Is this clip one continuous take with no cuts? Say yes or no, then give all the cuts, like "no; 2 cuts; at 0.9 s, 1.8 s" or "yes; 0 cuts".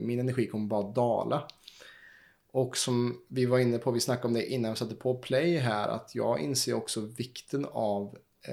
yes; 0 cuts